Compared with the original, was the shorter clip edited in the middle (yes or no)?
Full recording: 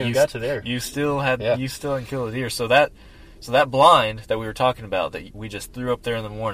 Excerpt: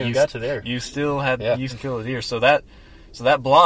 yes